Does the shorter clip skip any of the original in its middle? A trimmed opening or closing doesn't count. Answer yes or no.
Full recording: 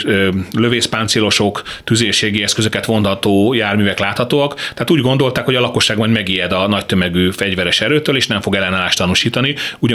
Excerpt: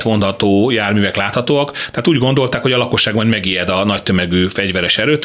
no